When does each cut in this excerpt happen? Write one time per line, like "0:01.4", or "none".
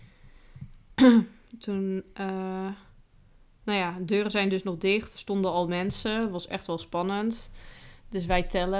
none